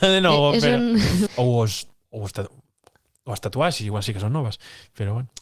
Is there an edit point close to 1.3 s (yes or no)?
yes